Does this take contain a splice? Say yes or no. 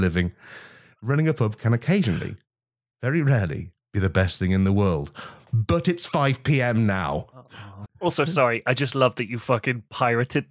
yes